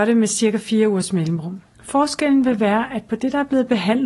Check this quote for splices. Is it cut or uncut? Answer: cut